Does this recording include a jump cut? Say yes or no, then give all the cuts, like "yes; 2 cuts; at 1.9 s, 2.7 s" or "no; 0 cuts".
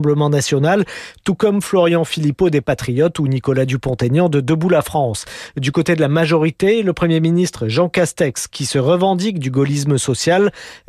no; 0 cuts